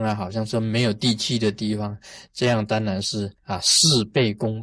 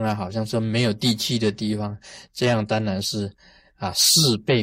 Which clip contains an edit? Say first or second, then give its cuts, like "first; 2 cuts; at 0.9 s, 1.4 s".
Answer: first; 1 cut; at 3.4 s